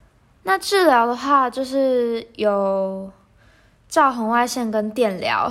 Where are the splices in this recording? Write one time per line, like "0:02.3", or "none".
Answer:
none